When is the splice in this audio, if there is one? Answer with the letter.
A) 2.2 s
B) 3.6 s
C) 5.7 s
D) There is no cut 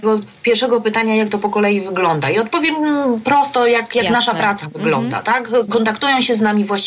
C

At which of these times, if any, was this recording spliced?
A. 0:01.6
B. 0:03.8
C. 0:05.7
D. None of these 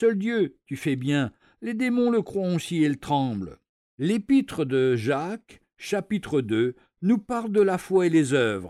B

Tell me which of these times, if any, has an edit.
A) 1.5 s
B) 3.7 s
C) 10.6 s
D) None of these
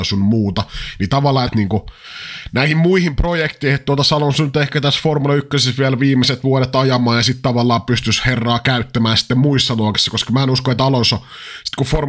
A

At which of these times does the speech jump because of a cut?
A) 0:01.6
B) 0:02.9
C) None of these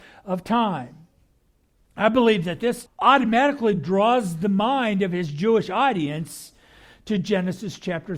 B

